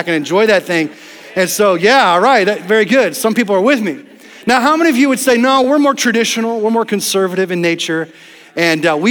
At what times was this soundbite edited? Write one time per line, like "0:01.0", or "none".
none